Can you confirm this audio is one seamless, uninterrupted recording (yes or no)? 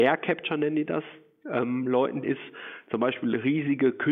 no